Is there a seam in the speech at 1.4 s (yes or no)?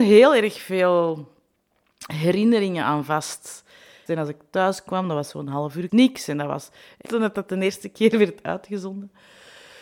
no